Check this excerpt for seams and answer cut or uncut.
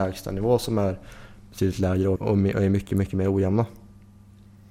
cut